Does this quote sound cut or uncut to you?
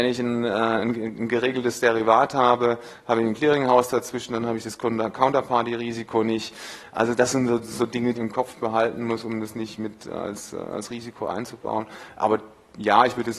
cut